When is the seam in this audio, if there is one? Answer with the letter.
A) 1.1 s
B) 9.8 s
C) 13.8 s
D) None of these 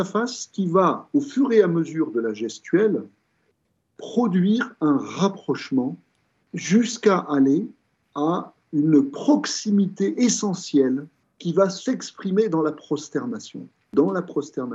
D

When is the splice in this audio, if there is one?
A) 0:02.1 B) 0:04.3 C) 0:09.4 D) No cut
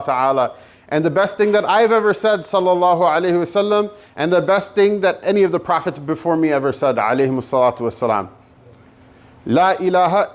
D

